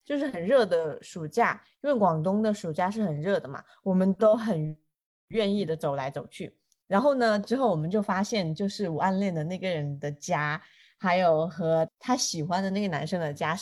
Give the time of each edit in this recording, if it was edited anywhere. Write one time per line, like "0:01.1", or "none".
0:11.9